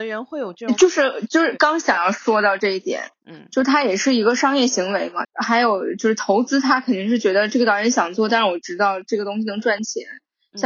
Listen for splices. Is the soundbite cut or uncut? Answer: cut